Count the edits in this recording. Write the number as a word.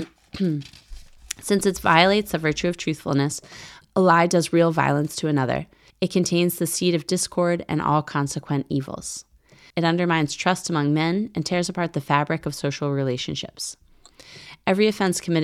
two